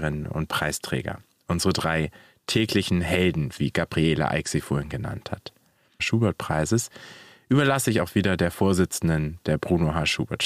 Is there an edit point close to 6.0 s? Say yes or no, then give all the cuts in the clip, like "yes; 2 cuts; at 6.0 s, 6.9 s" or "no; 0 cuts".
yes; 1 cut; at 6.0 s